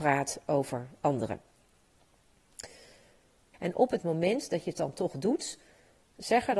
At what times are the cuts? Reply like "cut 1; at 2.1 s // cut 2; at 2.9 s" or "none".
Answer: cut 1; at 3.5 s